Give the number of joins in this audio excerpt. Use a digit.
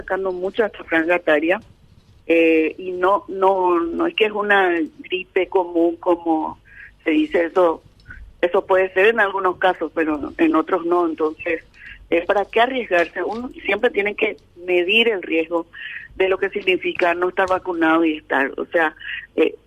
0